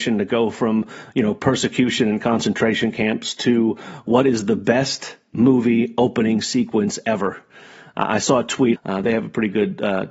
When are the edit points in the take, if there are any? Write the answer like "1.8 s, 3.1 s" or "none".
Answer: 8.7 s